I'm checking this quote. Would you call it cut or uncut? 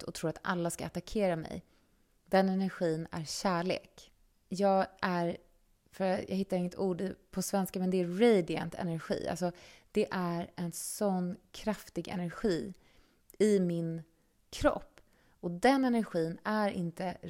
cut